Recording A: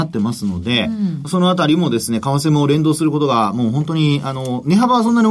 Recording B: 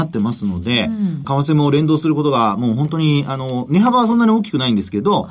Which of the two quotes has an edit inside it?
B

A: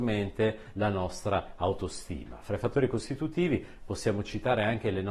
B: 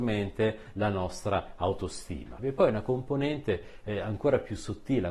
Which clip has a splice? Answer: B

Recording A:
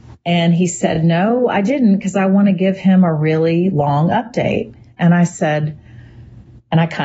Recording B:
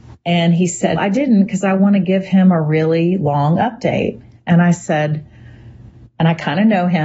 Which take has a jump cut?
B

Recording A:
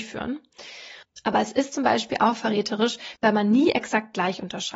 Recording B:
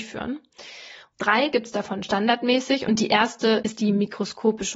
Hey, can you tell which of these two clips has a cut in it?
A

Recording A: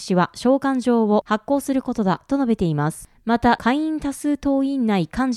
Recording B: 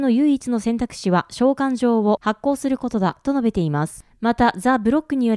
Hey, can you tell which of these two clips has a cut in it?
A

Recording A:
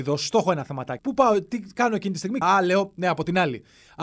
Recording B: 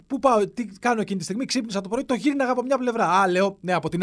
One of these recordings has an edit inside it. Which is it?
A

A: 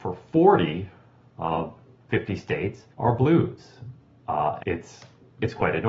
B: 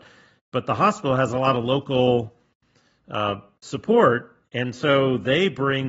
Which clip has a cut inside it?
A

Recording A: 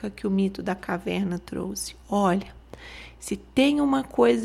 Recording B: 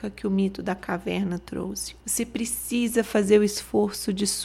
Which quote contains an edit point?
B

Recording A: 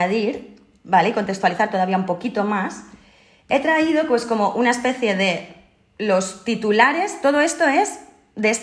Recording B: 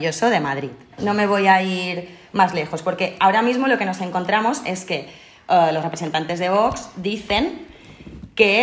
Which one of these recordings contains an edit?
B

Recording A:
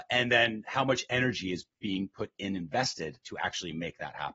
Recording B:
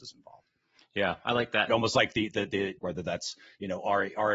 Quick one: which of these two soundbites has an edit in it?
B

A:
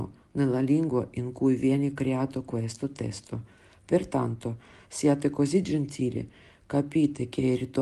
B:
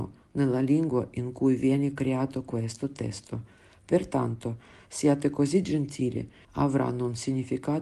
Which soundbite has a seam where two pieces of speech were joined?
B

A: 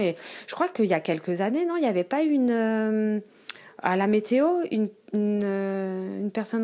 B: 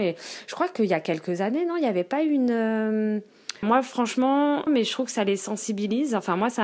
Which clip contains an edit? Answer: B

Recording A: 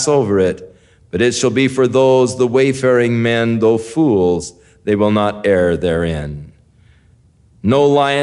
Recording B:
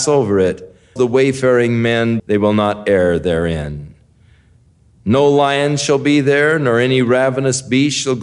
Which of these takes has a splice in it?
B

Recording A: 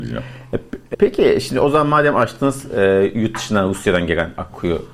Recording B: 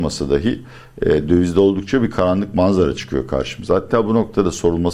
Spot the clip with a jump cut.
A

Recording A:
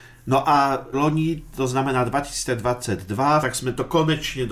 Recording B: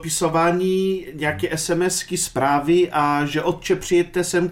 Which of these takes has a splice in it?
A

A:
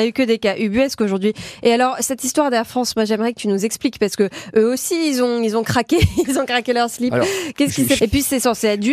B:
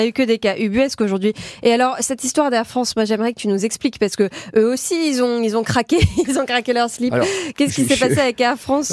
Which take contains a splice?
A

